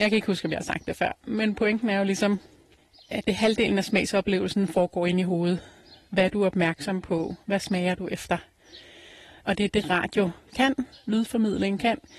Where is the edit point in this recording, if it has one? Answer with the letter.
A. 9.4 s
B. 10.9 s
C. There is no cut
B